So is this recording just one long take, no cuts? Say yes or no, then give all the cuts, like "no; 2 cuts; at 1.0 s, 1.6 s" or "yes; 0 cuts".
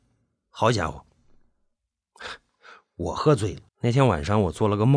no; 1 cut; at 3.7 s